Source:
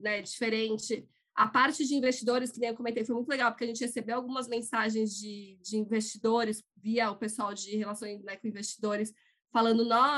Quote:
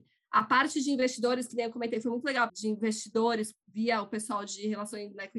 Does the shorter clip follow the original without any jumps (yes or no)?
no